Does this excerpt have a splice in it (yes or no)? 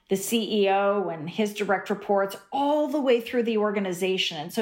no